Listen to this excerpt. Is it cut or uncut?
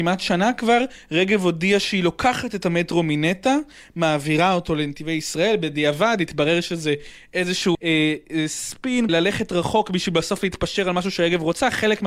cut